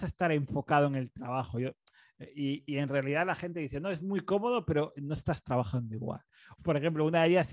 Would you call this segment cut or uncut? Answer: cut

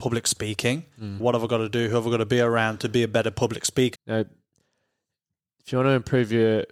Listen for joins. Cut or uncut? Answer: cut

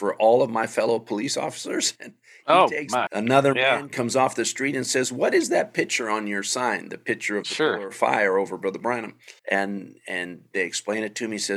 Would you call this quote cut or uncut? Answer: cut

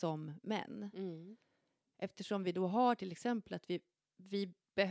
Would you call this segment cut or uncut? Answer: uncut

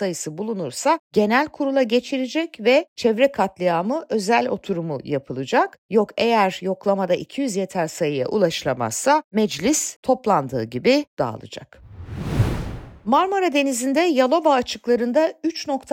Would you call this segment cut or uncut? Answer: uncut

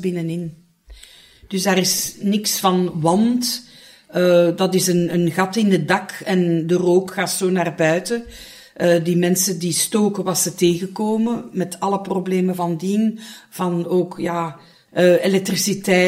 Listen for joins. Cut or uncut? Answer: uncut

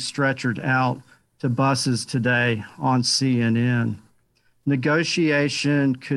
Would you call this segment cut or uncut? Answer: uncut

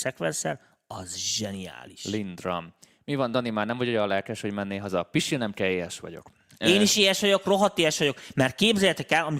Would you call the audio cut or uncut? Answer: uncut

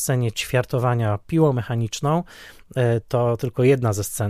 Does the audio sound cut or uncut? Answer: uncut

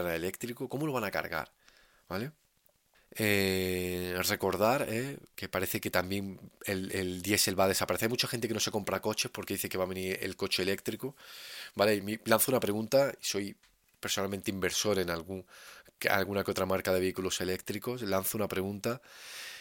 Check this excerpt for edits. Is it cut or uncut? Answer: cut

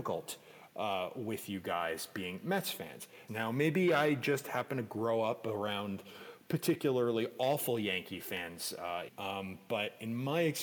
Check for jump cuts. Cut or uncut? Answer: cut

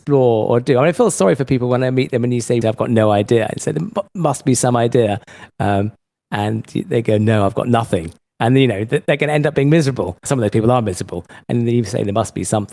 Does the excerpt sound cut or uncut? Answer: cut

